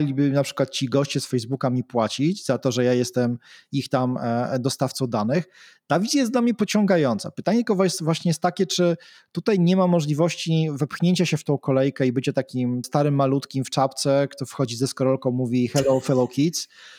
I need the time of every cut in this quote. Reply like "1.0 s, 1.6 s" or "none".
12.8 s